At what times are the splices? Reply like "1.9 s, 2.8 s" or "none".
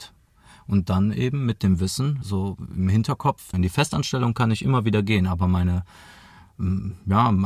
2.2 s, 3.5 s

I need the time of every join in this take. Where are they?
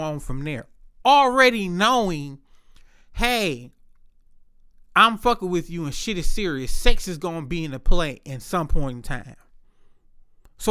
none

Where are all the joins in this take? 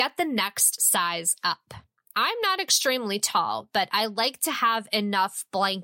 2.1 s

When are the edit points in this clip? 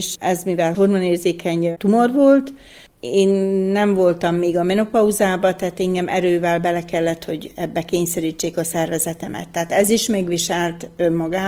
none

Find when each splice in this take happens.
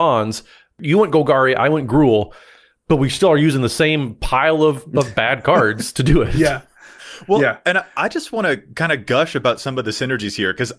none

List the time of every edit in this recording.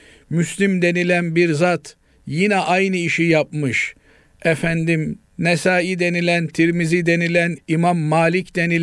7.6 s

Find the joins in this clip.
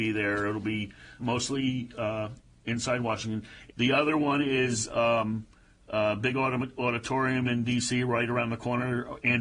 1.2 s, 3.7 s

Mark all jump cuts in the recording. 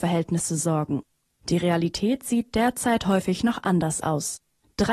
1.4 s

